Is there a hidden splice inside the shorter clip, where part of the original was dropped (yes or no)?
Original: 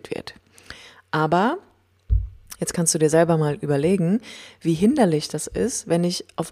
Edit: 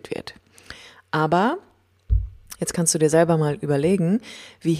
no